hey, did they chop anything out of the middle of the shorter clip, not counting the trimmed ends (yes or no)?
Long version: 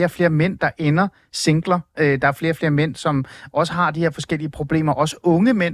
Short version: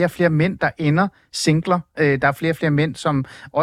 no